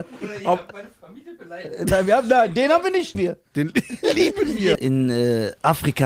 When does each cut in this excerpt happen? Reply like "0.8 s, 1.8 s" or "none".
3.1 s, 4.7 s